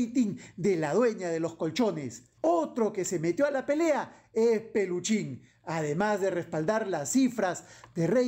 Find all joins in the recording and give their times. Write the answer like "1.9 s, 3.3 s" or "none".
2.4 s

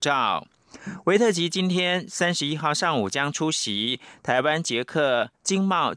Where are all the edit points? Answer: none

